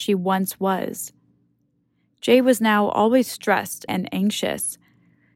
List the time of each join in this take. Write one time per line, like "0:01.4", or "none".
0:03.9